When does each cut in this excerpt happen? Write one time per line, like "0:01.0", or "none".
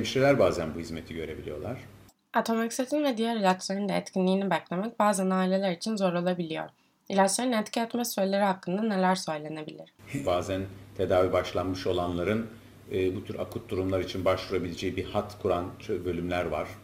0:10.2